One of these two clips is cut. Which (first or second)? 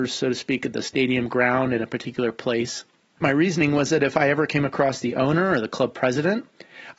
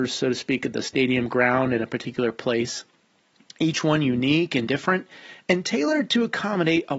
first